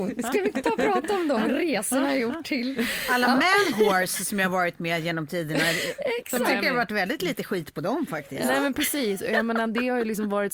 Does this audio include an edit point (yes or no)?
no